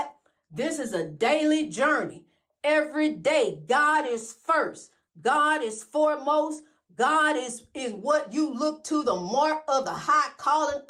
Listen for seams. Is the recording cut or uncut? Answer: uncut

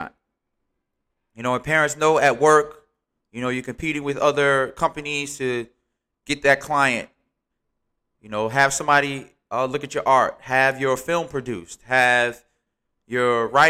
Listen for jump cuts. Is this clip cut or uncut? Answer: uncut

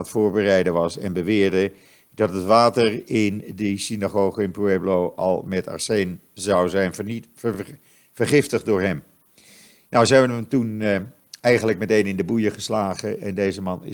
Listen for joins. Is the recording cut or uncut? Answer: uncut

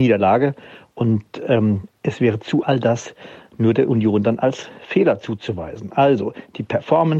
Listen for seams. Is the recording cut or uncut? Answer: cut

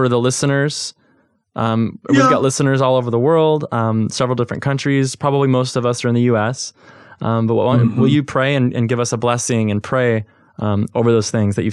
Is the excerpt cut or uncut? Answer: uncut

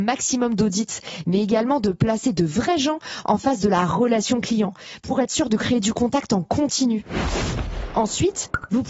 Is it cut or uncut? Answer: uncut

